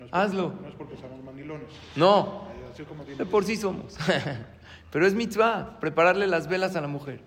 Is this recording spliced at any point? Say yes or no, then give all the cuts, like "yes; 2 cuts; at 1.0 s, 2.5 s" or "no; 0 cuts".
no; 0 cuts